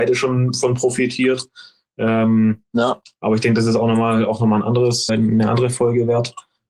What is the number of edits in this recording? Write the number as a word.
one